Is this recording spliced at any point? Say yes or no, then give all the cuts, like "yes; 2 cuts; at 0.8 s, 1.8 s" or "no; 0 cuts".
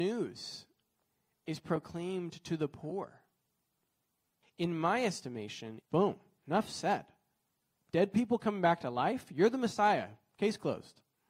yes; 2 cuts; at 4.4 s, 5.8 s